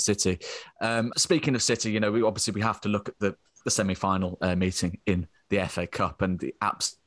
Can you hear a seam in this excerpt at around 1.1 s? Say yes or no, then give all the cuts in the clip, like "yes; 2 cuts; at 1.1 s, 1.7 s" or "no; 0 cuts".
yes; 1 cut; at 1.1 s